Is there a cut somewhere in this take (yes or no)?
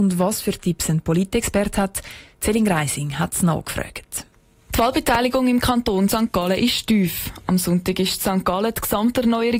no